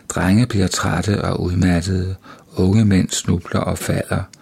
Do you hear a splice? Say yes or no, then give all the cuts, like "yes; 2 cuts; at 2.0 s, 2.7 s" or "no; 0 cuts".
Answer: no; 0 cuts